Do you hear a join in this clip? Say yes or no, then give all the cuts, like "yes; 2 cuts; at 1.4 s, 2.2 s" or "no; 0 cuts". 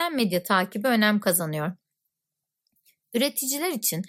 no; 0 cuts